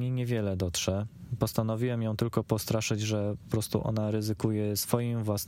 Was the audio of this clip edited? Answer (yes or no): no